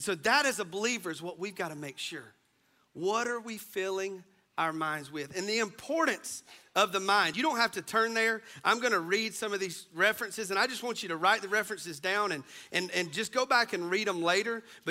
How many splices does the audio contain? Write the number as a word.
zero